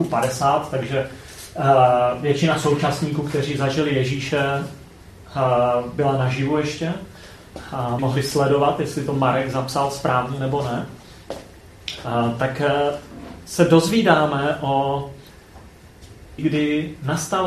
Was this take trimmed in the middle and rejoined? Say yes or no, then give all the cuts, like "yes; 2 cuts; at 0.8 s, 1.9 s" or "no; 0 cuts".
yes; 2 cuts; at 8.0 s, 16.4 s